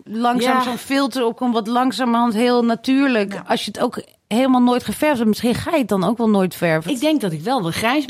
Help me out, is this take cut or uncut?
cut